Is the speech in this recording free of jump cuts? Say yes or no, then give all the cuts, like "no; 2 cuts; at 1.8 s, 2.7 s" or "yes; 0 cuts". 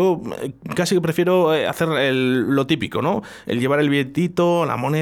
yes; 0 cuts